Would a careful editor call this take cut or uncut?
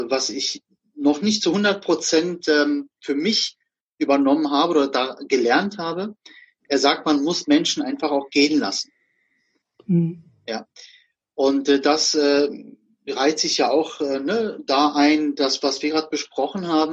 uncut